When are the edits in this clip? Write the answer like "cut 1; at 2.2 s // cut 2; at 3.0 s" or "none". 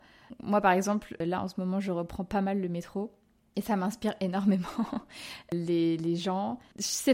none